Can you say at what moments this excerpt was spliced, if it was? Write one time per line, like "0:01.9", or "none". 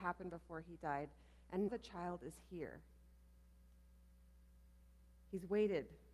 0:01.7